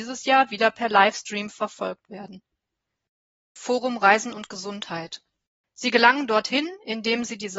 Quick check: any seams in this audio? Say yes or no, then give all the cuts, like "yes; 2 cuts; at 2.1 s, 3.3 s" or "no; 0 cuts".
yes; 2 cuts; at 3.6 s, 5.6 s